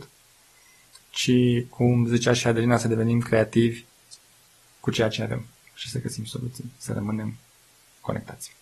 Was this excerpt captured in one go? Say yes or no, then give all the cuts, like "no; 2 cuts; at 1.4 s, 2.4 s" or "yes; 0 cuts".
yes; 0 cuts